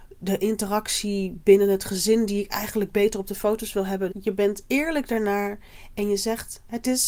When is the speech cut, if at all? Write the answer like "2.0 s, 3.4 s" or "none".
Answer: 4.1 s